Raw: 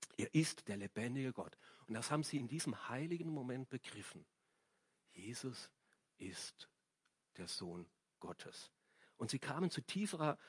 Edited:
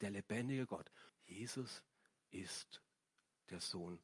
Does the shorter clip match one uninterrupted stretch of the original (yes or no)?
no